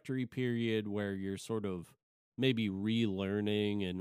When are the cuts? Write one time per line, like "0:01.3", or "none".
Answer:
none